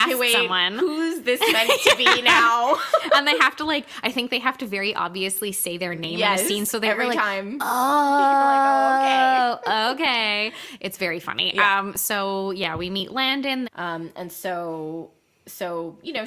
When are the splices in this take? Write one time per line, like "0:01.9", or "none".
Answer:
0:13.6